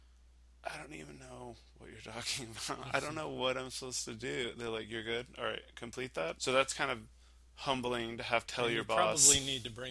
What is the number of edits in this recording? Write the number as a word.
two